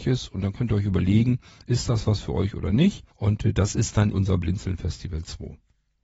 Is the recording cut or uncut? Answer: cut